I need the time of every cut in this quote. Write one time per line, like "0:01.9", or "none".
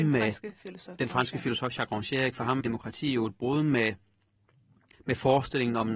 0:02.6
0:04.9